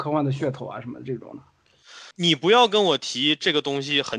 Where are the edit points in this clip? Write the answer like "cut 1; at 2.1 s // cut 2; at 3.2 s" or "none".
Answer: cut 1; at 2.1 s